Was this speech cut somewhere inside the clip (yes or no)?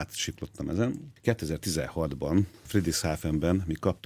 no